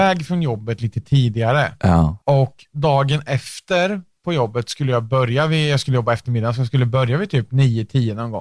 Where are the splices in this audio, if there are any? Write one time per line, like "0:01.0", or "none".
0:02.2